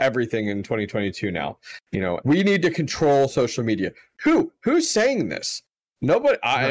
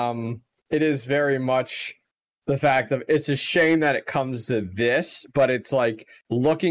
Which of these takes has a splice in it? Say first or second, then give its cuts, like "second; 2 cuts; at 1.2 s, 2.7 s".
first; 1 cut; at 2.2 s